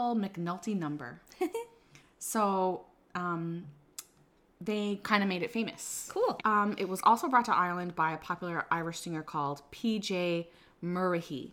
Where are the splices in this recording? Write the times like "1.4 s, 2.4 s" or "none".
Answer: 6.4 s